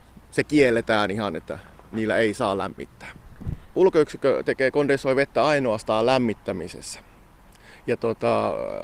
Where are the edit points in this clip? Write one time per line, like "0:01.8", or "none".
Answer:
0:03.7